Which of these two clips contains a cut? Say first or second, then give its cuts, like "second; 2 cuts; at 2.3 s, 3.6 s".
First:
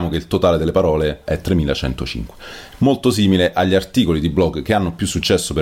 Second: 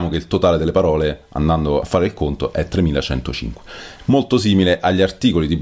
first; 1 cut; at 1.3 s